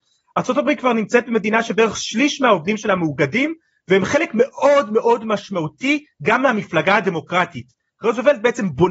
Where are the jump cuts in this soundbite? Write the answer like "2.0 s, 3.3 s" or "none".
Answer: none